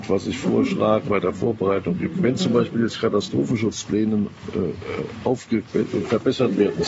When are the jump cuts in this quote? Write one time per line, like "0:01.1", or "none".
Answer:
0:01.1

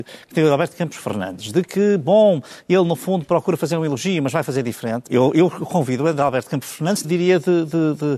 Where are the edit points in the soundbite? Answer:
0:05.1
0:07.0

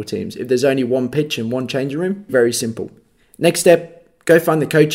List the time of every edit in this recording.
0:02.3

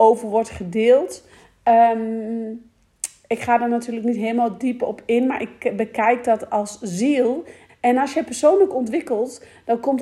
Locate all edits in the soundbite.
0:07.7

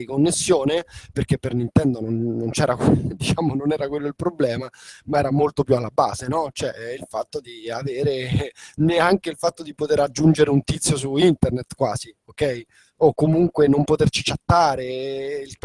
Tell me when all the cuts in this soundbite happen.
none

